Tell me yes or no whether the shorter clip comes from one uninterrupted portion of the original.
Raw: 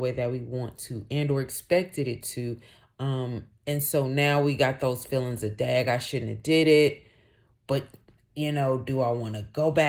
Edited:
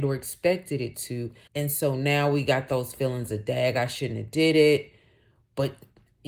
no